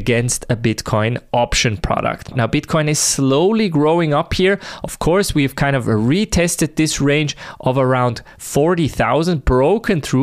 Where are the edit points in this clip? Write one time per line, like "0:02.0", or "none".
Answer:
0:02.3